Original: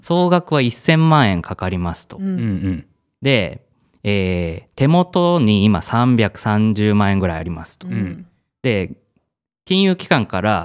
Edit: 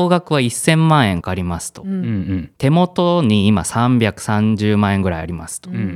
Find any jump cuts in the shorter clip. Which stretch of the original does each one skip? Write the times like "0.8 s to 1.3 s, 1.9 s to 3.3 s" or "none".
1.4 s to 1.6 s, 2.9 s to 4.7 s